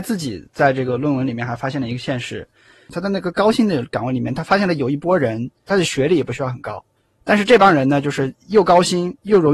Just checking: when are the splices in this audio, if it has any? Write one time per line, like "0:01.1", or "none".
0:05.7